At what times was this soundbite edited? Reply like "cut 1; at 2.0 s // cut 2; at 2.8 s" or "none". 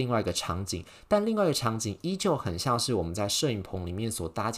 none

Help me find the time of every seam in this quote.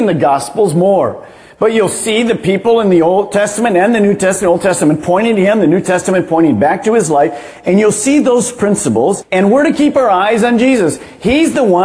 none

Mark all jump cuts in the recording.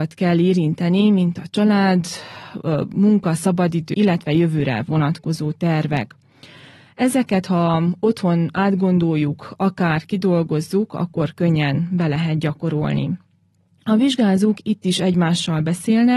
cut 1; at 3.9 s

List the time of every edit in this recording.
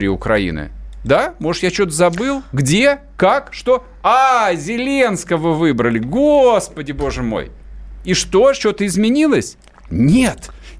none

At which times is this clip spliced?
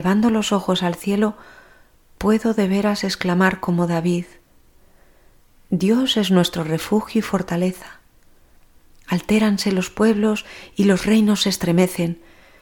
none

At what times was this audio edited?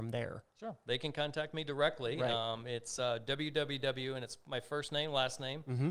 none

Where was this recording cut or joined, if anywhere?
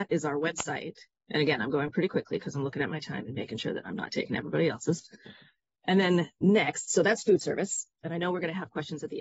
cut 1; at 1.2 s

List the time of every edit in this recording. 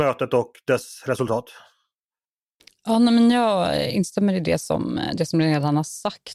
none

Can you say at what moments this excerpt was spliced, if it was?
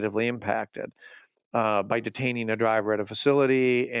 none

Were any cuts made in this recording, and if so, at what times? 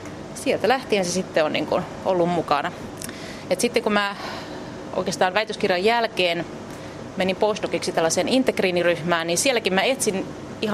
none

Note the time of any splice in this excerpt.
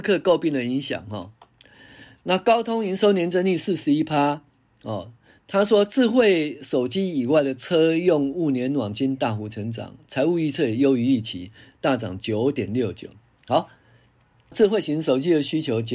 cut 1; at 14.5 s

